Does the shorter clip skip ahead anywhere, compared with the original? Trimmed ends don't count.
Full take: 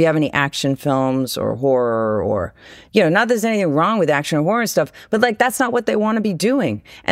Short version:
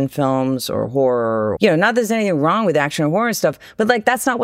yes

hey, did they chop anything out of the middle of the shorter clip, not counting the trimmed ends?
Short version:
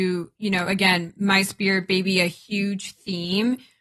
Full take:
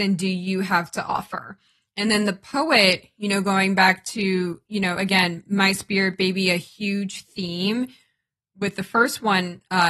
no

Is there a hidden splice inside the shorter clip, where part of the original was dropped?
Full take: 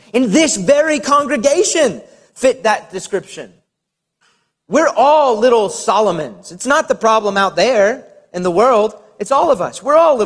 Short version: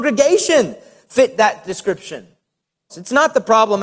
yes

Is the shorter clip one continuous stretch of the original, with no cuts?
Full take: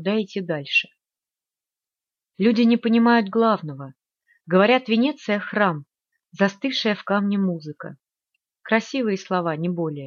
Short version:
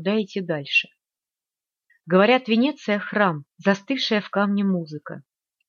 no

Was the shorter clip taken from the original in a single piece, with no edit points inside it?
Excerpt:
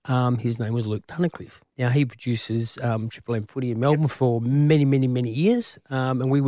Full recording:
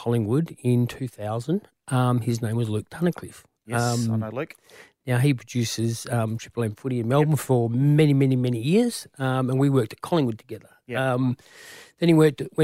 no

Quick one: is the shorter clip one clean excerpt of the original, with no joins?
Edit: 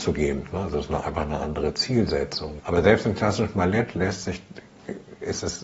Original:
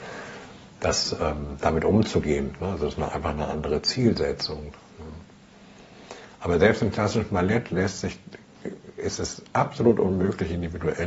no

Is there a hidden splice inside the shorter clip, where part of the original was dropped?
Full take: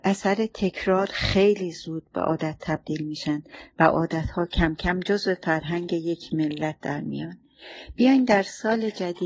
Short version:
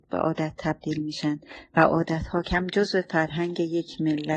yes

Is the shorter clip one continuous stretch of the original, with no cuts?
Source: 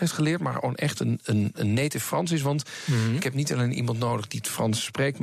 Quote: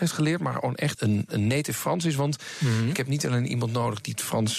no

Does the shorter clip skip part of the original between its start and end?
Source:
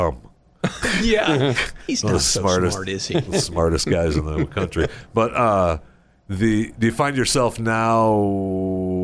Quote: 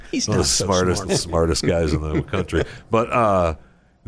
yes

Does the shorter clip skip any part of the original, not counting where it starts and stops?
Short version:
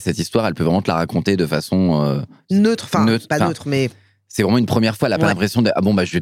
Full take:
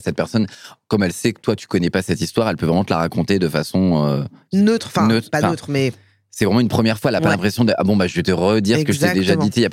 no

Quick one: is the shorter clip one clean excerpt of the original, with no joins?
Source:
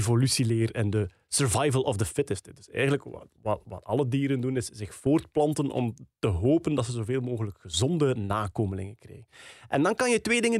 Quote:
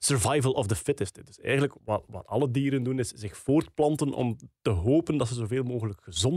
no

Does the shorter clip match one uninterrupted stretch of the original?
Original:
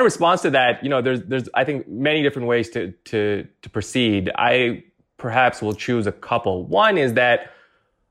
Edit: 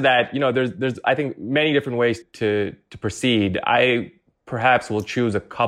no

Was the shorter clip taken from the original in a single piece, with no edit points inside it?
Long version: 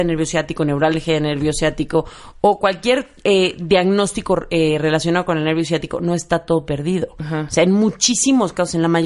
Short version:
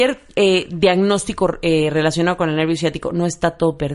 yes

